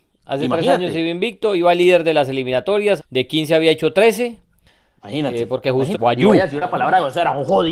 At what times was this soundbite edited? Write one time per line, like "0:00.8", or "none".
0:03.0
0:05.9